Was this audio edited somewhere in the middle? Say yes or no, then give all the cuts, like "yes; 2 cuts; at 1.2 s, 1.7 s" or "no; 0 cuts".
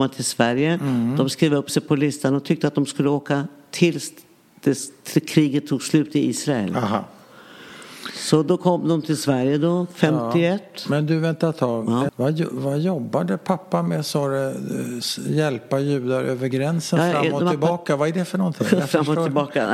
yes; 1 cut; at 12.1 s